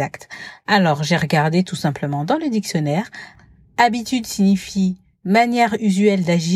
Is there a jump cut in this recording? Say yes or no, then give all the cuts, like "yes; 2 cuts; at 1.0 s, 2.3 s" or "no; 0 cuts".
no; 0 cuts